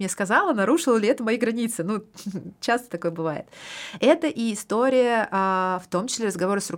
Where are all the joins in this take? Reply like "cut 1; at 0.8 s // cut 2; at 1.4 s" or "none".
none